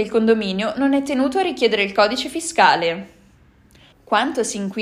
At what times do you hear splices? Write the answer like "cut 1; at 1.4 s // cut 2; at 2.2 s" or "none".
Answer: cut 1; at 3.9 s